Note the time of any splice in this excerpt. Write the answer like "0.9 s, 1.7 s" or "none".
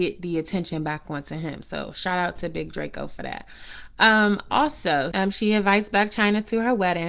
5.1 s